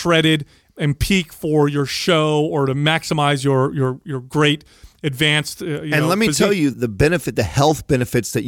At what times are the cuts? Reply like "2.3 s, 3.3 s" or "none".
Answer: 6.7 s